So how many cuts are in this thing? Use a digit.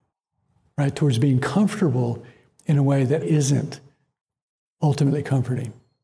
1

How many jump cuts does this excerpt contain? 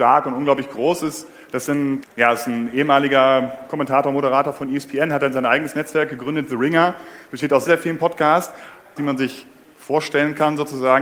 3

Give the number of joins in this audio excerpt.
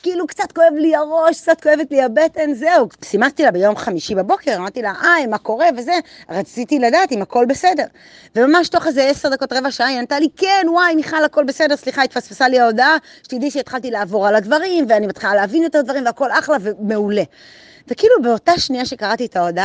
1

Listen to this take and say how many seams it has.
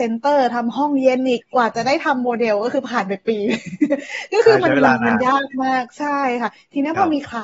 1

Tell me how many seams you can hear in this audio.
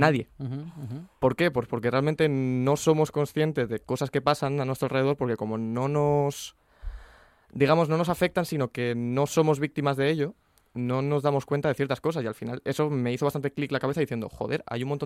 0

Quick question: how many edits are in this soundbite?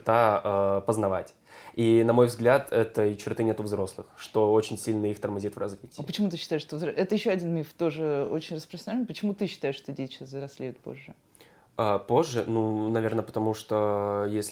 0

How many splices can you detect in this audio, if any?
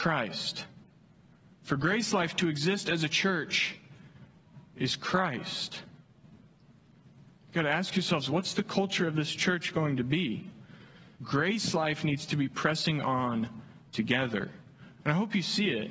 2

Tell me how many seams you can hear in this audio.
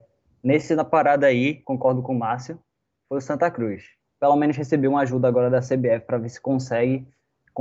2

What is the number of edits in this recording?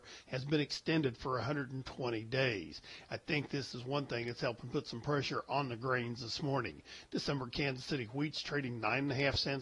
0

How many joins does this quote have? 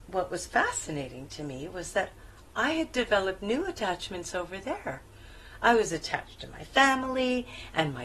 0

